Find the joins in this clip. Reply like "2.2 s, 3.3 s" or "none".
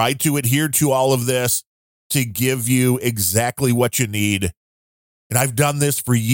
5.1 s